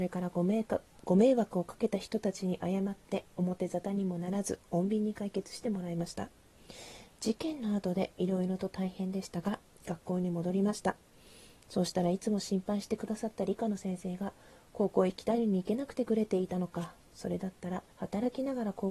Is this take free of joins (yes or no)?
no